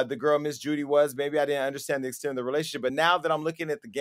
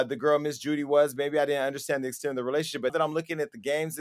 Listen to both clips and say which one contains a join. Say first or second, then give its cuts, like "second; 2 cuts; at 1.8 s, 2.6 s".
second; 1 cut; at 2.9 s